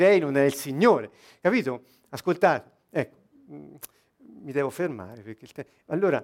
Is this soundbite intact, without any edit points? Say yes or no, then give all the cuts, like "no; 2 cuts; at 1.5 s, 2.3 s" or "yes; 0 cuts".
yes; 0 cuts